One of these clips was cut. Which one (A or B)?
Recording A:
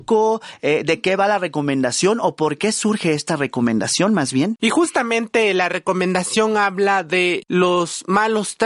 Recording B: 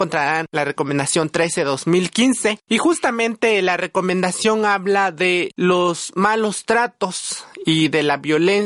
A